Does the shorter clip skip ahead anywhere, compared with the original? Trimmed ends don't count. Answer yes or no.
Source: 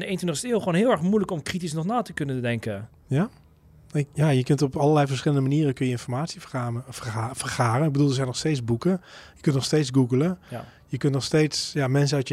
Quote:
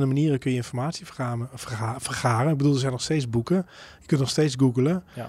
no